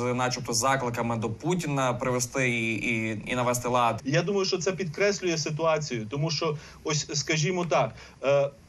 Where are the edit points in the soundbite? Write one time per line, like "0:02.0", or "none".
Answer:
0:04.0

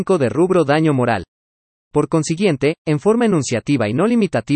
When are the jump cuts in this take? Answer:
0:01.8

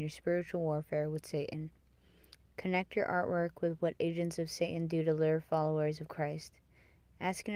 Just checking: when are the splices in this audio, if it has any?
0:02.4

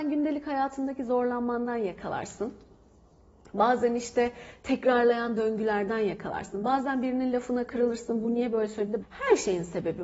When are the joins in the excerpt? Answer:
0:09.0

